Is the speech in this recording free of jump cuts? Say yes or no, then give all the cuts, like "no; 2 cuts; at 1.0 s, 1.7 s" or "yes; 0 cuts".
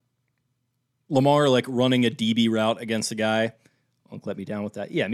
yes; 0 cuts